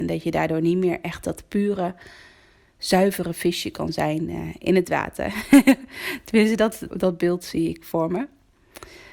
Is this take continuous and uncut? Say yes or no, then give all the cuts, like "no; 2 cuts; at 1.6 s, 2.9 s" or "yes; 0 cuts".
no; 1 cut; at 6.9 s